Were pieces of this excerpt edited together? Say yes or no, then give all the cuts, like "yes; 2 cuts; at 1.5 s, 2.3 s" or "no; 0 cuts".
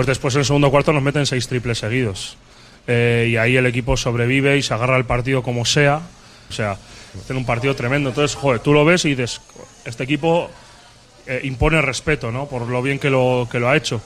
yes; 1 cut; at 6.5 s